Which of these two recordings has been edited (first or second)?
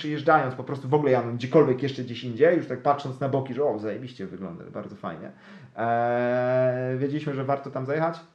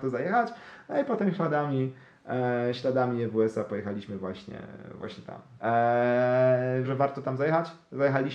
second